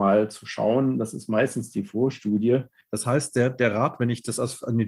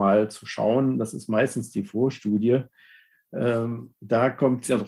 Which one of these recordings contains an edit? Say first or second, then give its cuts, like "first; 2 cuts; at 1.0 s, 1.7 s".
first; 1 cut; at 2.8 s